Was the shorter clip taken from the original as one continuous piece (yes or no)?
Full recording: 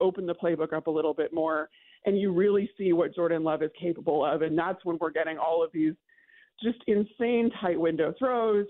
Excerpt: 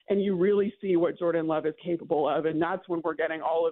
yes